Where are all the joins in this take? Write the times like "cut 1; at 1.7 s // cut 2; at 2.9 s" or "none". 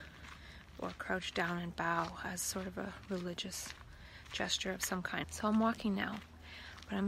cut 1; at 5.2 s